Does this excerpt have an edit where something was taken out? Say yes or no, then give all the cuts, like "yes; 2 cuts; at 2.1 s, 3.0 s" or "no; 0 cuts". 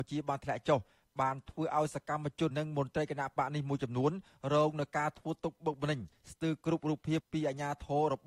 yes; 2 cuts; at 2.5 s, 7.2 s